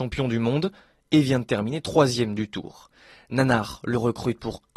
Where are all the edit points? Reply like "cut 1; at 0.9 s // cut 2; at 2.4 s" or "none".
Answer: none